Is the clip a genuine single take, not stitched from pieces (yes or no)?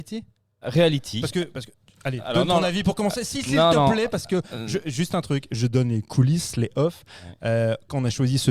yes